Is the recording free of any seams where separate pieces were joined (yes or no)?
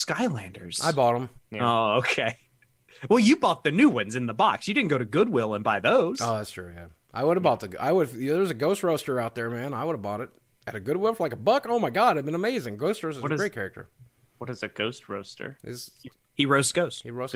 no